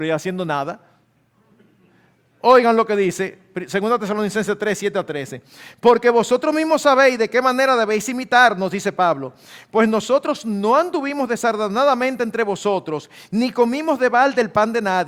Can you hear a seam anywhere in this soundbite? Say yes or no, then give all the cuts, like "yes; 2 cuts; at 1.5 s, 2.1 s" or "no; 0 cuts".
no; 0 cuts